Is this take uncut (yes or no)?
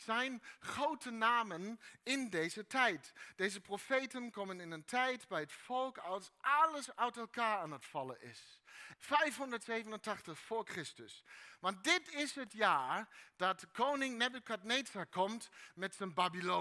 no